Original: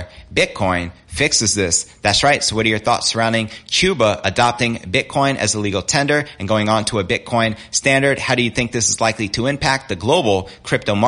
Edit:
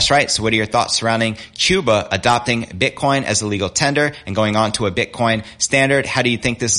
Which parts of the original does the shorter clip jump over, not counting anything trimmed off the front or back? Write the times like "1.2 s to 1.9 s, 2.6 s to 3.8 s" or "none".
none